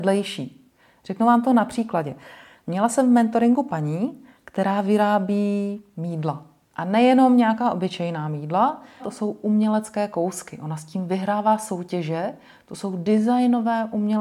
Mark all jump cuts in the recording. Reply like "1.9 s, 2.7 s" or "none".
9.0 s